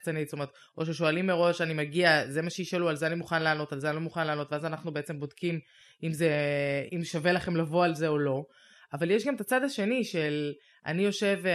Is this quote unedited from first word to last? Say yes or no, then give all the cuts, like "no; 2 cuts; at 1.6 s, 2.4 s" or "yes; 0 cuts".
no; 1 cut; at 6.9 s